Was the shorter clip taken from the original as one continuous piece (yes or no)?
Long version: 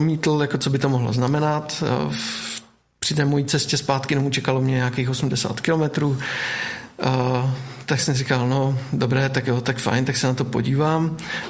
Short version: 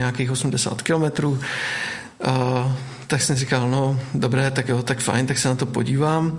yes